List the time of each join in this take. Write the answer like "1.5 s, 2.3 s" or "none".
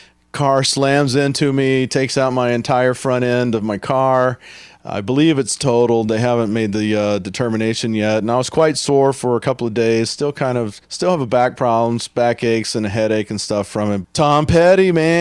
10.8 s, 14.0 s